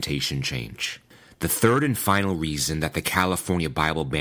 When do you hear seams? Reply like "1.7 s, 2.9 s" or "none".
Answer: none